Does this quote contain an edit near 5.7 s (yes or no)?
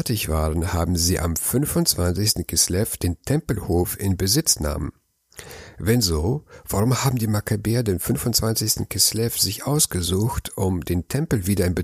no